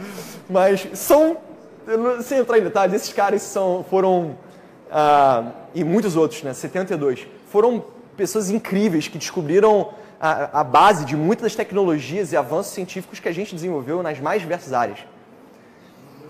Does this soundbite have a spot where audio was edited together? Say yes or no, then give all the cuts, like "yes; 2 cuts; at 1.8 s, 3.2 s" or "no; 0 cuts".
no; 0 cuts